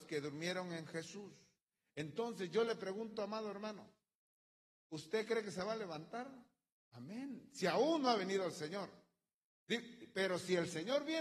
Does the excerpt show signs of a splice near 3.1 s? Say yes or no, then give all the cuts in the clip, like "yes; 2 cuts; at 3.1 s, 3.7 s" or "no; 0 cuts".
no; 0 cuts